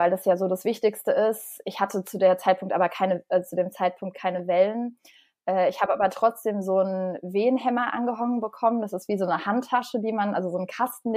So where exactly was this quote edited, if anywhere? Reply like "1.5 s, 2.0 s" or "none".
none